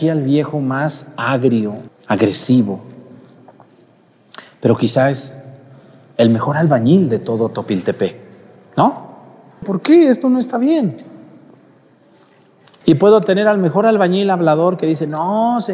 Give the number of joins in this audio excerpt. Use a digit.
3